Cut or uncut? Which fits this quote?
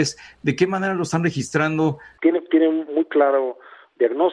cut